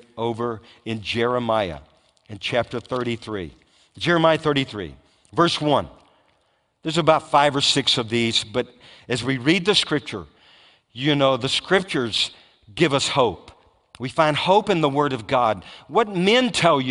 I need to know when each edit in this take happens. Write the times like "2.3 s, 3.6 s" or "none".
none

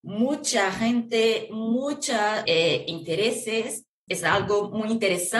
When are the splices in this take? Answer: 2.5 s, 4.1 s

